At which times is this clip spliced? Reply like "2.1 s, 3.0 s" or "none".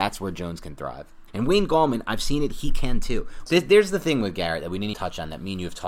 1.3 s, 3.5 s, 4.9 s